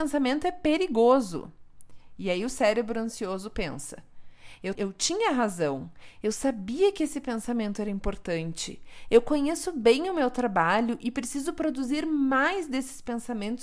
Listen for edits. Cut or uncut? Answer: cut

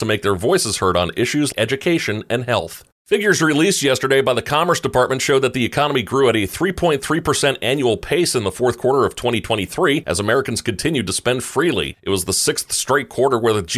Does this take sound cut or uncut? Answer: cut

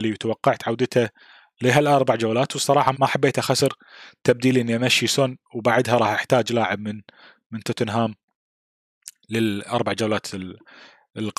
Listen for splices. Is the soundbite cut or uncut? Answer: cut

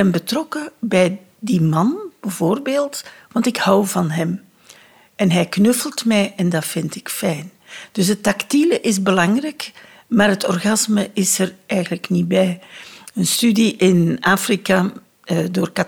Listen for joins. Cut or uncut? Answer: uncut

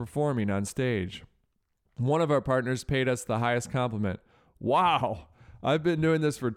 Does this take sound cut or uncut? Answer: uncut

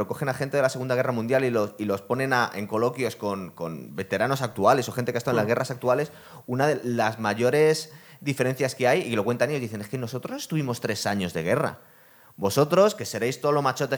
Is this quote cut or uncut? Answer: uncut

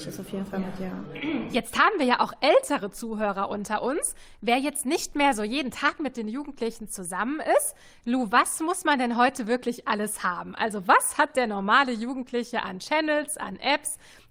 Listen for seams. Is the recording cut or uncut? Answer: uncut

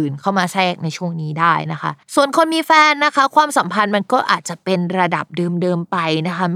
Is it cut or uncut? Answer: cut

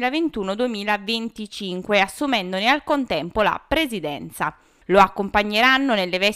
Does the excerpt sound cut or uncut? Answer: uncut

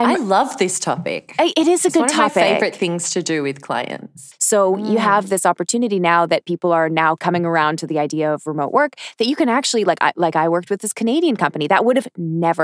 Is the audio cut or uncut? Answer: cut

